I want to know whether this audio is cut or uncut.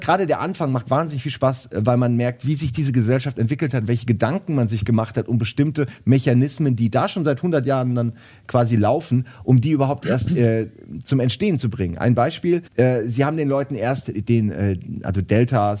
cut